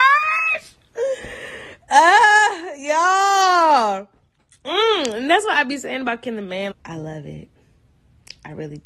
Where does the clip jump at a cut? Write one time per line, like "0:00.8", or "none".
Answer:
0:06.7

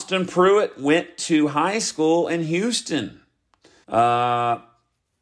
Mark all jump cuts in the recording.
0:03.8

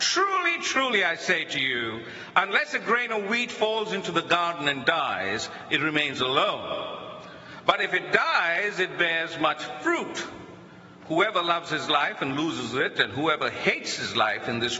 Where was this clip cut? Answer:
none

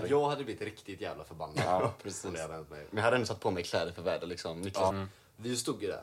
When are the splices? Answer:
0:04.9

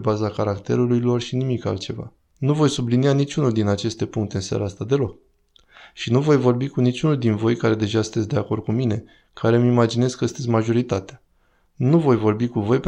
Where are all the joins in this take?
0:02.3

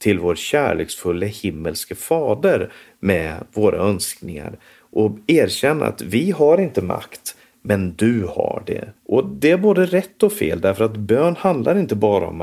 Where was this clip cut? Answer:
0:09.0

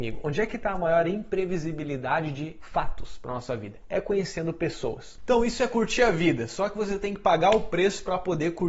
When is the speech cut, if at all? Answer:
0:05.2

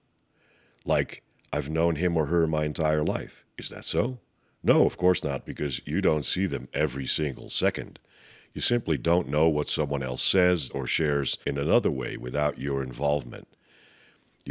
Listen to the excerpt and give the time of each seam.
0:10.7

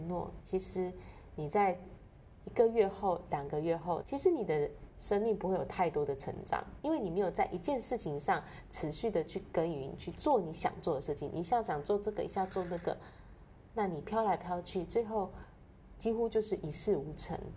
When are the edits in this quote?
0:04.0

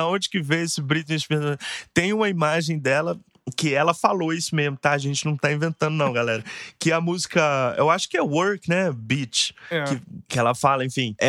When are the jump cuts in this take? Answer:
none

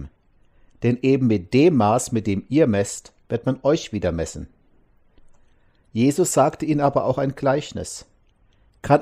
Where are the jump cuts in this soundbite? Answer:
none

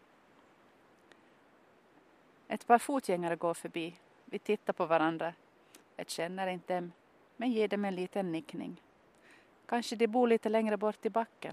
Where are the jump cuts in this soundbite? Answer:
none

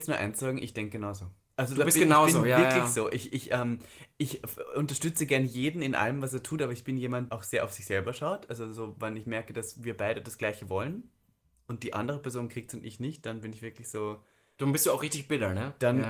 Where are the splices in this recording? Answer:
0:07.3

